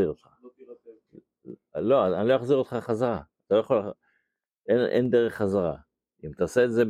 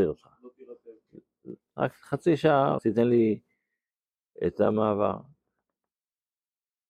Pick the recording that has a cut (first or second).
second